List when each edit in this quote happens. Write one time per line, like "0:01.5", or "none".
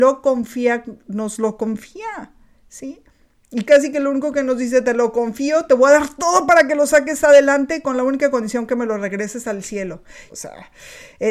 0:03.7
0:10.3